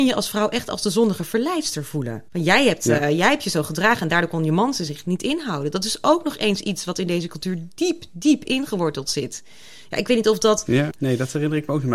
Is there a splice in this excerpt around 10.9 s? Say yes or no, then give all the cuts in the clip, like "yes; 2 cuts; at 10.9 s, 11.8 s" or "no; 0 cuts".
yes; 2 cuts; at 2.3 s, 10.9 s